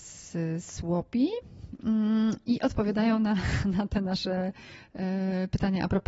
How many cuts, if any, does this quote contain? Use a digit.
0